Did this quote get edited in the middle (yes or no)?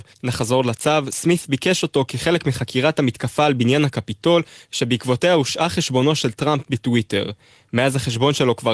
no